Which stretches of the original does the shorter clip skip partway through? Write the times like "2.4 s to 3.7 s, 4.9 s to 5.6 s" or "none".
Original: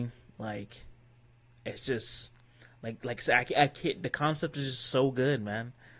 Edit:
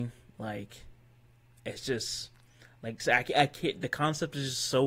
3.0 s to 3.2 s